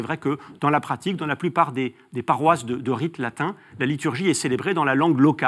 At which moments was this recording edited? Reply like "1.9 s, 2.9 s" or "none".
none